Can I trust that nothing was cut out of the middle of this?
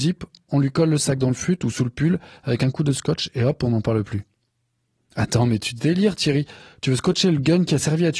yes; 0 cuts

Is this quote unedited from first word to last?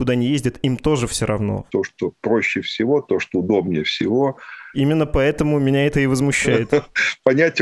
no; 2 cuts; at 1.7 s, 4.7 s

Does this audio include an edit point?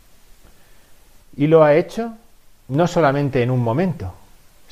yes; 2 cuts; at 1.2 s, 2.6 s

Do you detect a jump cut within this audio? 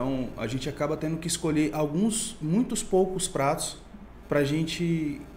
yes; 1 cut; at 4.2 s

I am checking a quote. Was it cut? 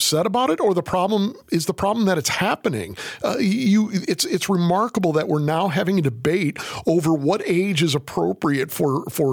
no; 0 cuts

